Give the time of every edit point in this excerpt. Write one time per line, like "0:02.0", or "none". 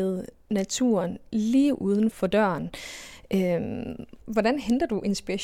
0:02.1

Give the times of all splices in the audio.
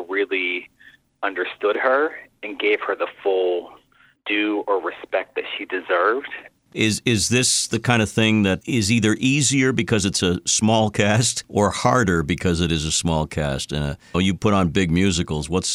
0:06.6
0:14.1

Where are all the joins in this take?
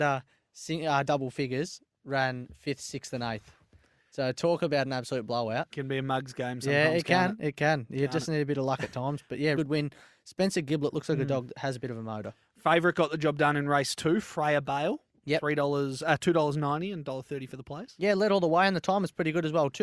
0:09.5

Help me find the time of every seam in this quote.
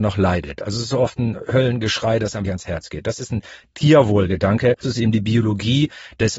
0:02.4
0:04.8

